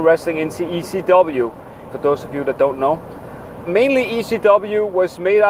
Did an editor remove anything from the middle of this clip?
yes; 2 cuts; at 1.9 s, 3.7 s

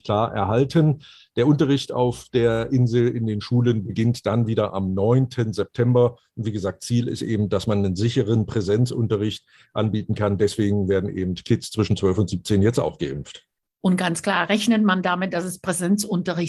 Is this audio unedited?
yes; 0 cuts

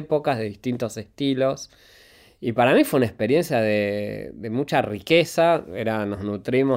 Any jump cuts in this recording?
no; 0 cuts

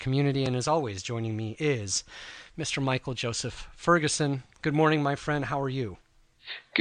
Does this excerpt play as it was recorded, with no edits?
yes; 0 cuts

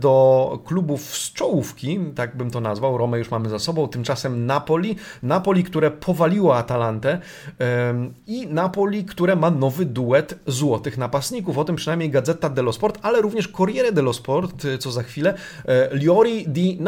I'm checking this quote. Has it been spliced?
no; 0 cuts

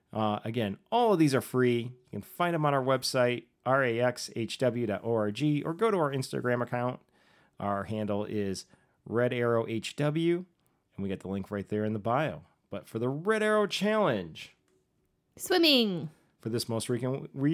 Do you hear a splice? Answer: no; 0 cuts

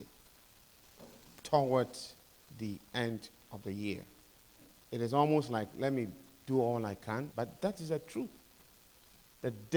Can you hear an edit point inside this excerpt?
yes; 1 cut; at 7.3 s

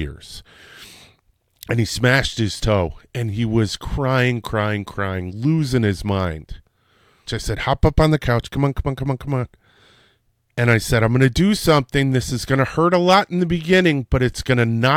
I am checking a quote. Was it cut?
yes; 1 cut; at 7.3 s

